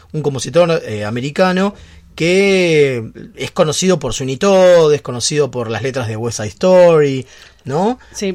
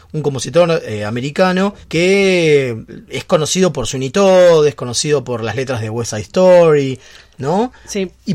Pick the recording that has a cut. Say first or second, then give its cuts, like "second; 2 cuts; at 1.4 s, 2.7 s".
second; 1 cut; at 1.8 s